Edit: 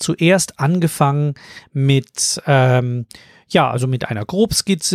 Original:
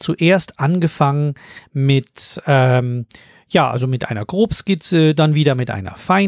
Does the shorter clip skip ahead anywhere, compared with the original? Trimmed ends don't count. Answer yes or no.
no